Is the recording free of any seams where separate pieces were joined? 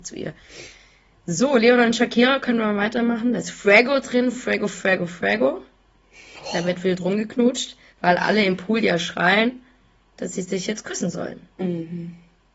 yes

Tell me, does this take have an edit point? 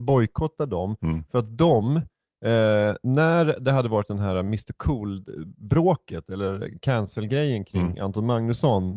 no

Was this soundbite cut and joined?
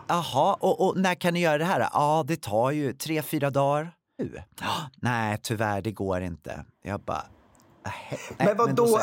yes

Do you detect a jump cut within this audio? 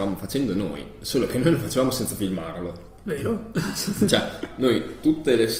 no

